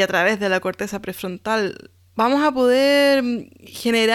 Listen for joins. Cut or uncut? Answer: cut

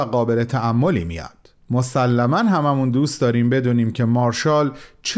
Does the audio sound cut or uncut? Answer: cut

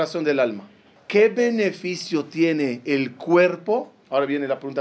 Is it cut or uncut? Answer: cut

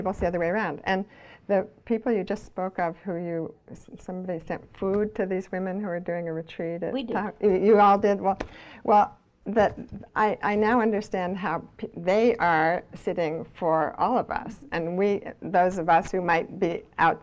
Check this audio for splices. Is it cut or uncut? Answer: uncut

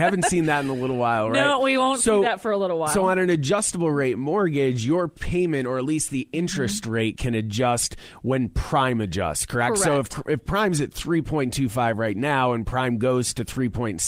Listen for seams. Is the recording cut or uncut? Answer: uncut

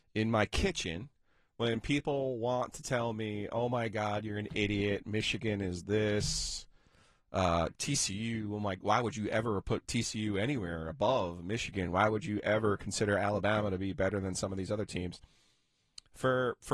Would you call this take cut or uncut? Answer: uncut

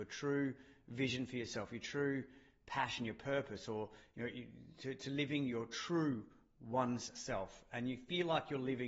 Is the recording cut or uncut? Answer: uncut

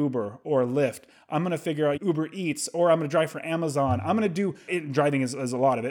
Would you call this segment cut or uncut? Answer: cut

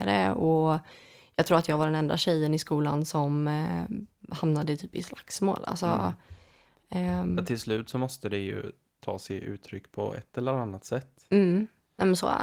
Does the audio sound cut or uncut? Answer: uncut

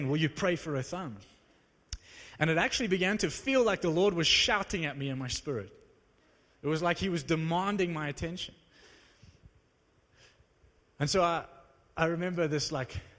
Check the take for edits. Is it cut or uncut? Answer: uncut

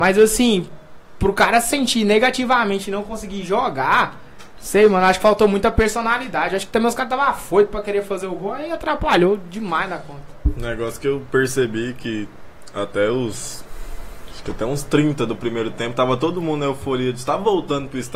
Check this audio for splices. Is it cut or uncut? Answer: uncut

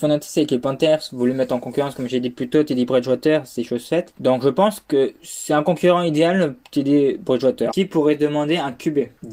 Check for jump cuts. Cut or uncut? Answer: cut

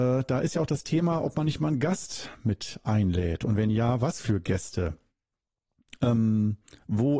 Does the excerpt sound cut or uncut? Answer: uncut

